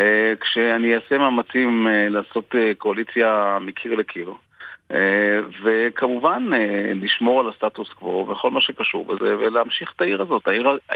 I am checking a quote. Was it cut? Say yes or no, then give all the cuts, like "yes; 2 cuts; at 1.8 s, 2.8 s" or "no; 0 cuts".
no; 0 cuts